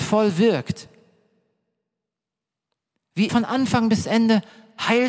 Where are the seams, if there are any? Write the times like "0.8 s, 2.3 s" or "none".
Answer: 3.3 s